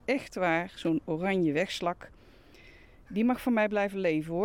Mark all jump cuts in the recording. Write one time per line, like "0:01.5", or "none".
none